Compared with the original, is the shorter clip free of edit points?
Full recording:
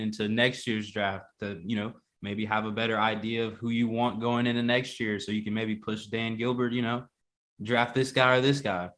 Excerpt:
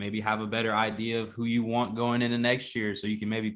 yes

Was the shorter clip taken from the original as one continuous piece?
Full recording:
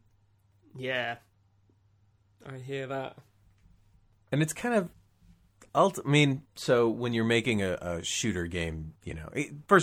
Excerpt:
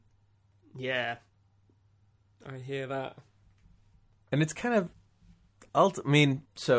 yes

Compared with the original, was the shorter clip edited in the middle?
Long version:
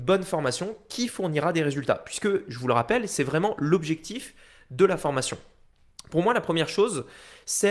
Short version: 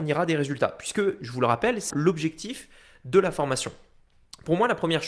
yes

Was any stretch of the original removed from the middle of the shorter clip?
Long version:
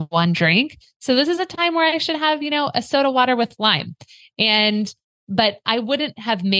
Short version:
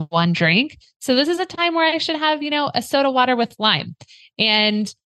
no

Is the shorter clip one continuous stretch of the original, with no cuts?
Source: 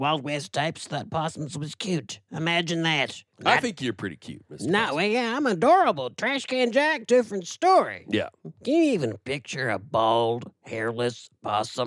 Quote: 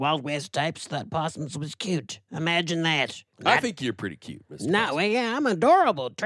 yes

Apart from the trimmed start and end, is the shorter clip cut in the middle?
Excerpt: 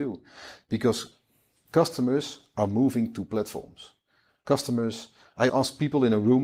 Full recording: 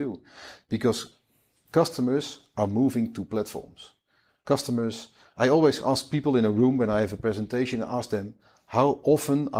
yes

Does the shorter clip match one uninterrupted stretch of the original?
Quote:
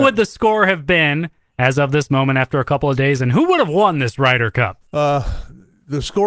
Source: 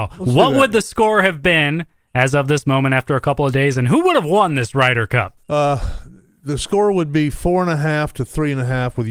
yes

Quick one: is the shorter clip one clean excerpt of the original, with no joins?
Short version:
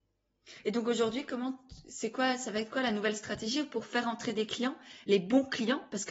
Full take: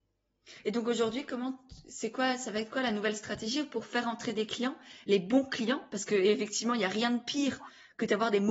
yes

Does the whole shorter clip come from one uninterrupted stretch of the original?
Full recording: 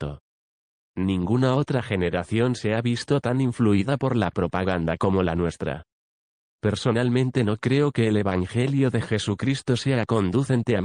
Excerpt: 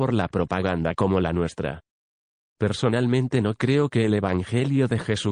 yes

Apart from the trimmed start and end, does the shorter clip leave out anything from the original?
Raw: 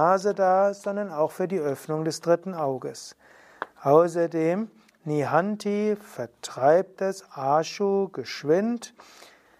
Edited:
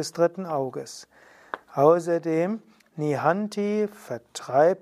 no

